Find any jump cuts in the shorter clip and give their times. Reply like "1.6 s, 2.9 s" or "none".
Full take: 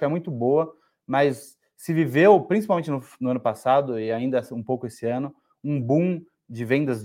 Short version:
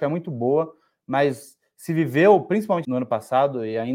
2.8 s